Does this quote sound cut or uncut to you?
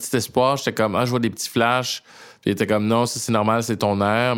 uncut